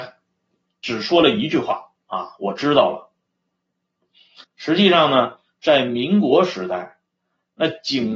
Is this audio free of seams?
no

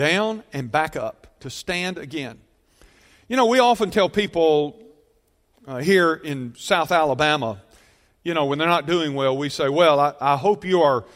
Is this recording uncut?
yes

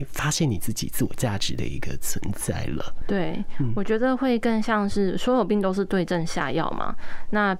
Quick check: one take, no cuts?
yes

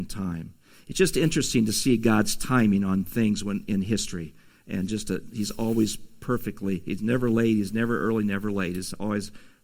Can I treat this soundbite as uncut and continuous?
yes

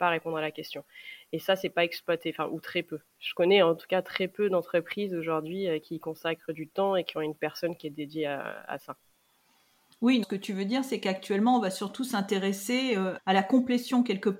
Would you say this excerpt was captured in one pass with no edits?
no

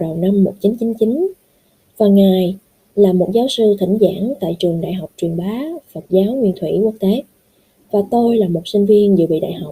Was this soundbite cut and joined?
no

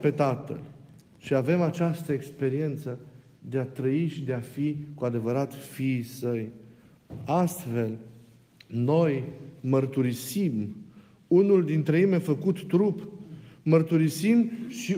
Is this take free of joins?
yes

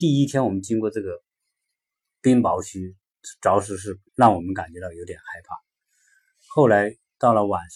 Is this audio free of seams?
no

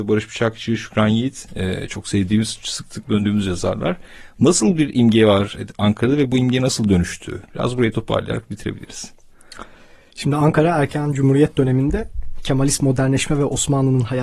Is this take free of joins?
yes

